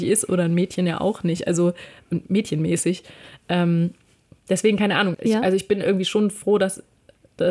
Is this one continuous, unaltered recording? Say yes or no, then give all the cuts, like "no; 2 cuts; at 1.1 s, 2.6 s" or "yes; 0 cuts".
no; 1 cut; at 5.1 s